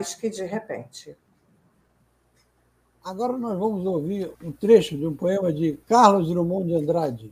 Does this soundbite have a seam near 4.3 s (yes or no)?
yes